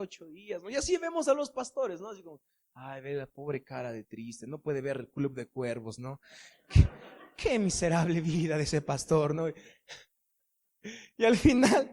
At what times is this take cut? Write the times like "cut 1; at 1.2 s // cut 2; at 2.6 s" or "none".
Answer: none